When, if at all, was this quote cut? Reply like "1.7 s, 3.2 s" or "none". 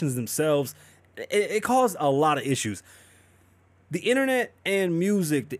none

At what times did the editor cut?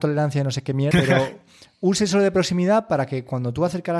0.9 s

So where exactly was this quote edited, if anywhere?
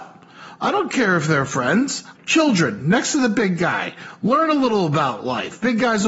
2.2 s

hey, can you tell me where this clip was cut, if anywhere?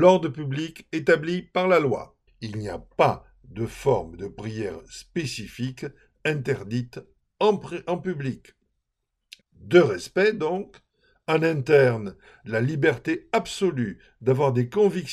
2.3 s, 9.4 s

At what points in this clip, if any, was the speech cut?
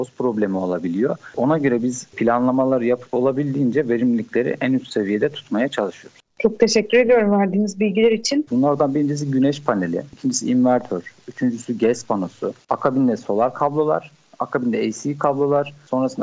8.5 s

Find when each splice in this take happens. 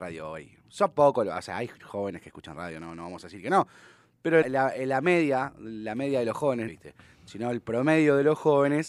4.4 s, 6.7 s

